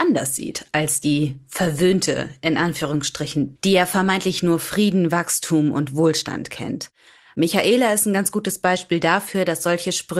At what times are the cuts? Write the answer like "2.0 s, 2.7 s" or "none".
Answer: 3.6 s